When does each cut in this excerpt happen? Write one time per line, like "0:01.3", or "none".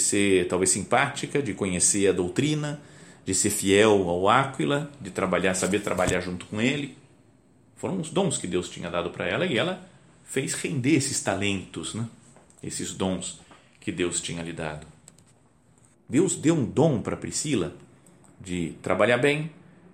0:15.9